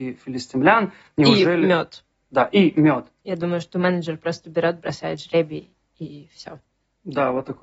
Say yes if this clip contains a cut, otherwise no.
yes